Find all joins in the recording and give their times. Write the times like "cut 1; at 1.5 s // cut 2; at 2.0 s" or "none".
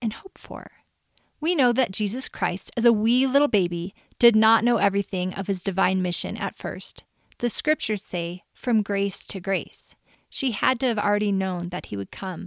cut 1; at 10.1 s